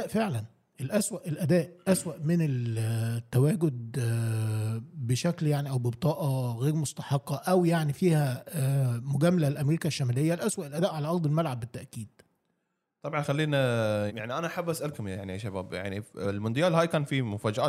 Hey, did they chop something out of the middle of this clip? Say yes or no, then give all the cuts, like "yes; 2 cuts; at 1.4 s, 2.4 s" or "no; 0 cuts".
yes; 1 cut; at 14.1 s